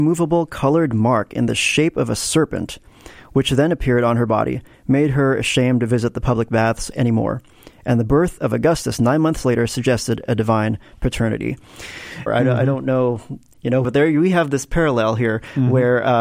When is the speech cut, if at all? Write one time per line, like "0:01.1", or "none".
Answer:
0:12.3
0:13.8